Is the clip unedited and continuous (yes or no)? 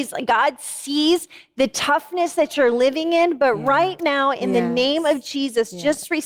yes